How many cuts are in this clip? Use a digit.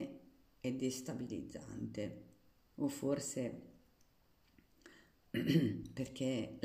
1